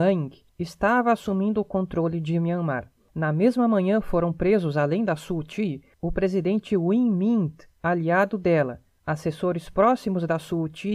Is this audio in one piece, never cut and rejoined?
yes; 0 cuts

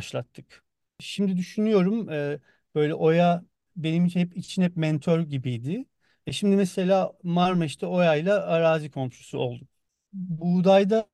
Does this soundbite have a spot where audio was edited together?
no; 0 cuts

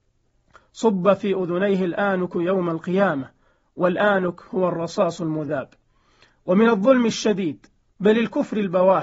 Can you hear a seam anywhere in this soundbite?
no; 0 cuts

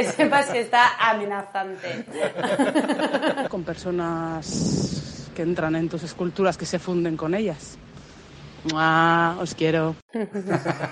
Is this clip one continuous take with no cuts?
no; 1 cut; at 3.5 s

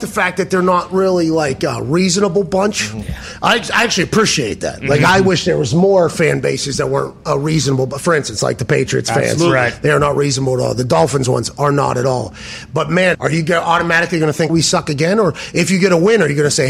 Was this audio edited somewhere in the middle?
yes; 2 cuts; at 13.1 s, 14.5 s

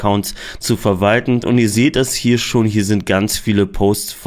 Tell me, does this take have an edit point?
no; 0 cuts

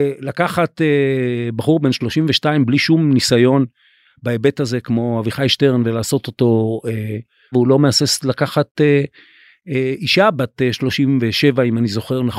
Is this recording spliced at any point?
yes; 1 cut; at 7.5 s

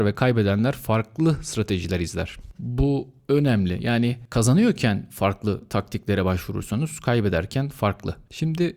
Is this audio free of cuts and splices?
yes; 0 cuts

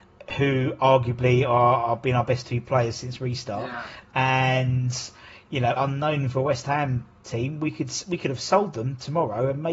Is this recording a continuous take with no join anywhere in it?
no; 1 cut; at 5.8 s

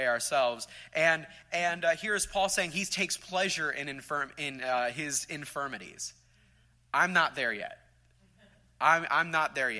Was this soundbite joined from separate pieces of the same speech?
no; 0 cuts

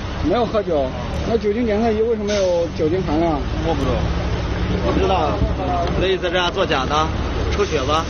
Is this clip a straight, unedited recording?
yes; 0 cuts

